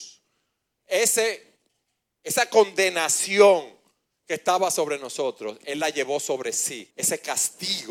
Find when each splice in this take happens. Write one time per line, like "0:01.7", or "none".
0:06.9

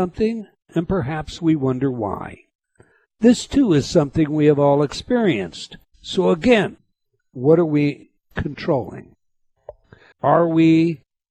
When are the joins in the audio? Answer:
0:05.9
0:10.1

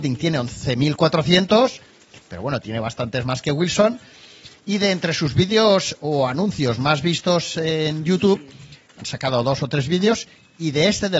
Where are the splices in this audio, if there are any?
0:02.2
0:08.9

